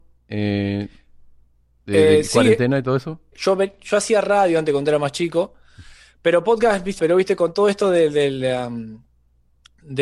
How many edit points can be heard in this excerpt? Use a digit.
2